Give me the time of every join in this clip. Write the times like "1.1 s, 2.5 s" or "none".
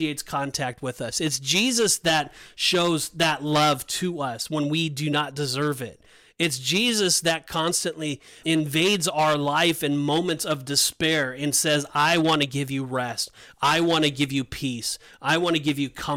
8.4 s

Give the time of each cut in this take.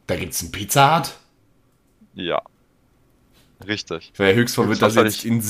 none

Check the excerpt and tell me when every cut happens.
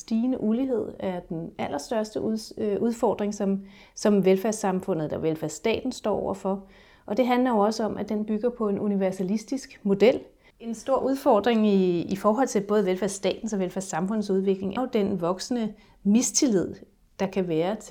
10.5 s, 14.8 s

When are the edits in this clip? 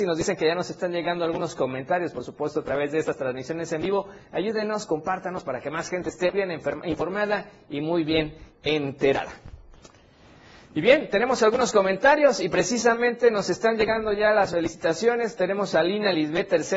6.3 s

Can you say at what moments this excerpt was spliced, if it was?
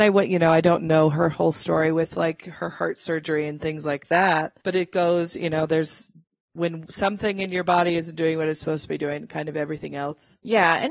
4.6 s

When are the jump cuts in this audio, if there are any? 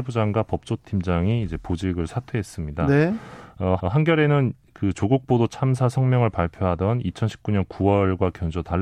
3.8 s

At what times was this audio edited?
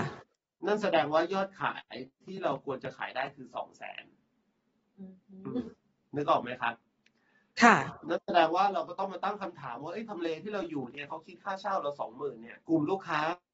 12.6 s

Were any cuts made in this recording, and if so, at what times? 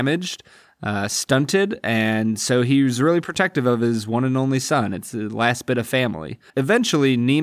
6.5 s

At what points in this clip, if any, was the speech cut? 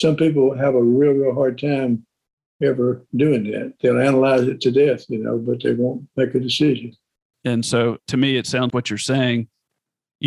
7.3 s, 8.7 s

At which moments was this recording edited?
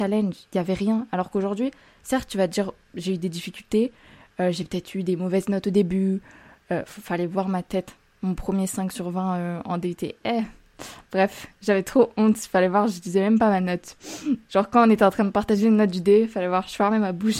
none

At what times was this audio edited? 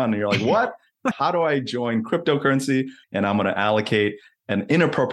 1.1 s, 3.0 s

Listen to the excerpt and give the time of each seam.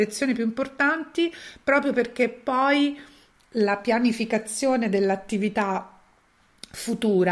none

